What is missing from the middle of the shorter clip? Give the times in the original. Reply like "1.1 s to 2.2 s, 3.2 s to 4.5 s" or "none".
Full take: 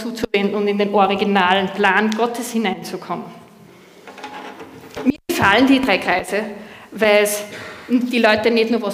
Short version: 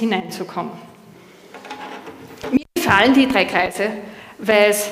none

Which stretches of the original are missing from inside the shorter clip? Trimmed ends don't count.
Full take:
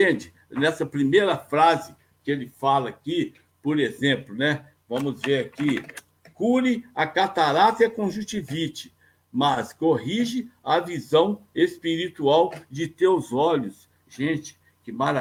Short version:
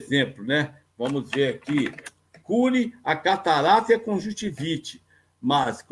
none

